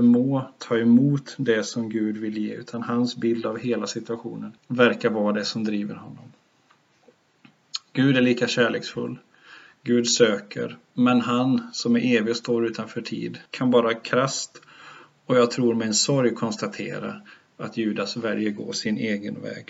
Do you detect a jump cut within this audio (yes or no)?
yes